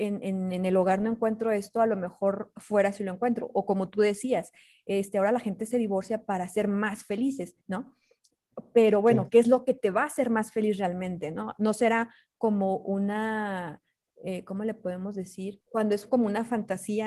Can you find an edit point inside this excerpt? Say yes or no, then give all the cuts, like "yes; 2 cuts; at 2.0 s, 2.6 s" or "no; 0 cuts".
yes; 1 cut; at 15.7 s